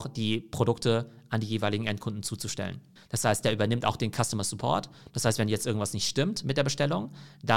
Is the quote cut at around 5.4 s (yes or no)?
no